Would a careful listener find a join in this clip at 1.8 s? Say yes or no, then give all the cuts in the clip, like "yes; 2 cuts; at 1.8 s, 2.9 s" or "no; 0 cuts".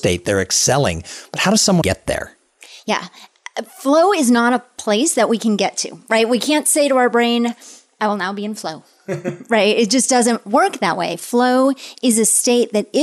yes; 1 cut; at 1.8 s